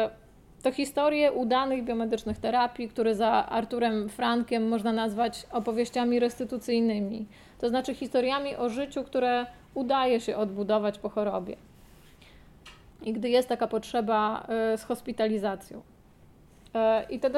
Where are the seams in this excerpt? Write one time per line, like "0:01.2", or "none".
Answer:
0:12.9